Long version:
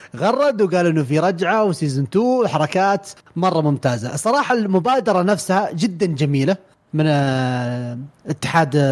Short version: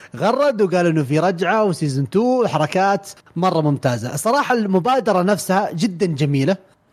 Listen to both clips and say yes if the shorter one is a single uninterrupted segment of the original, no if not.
yes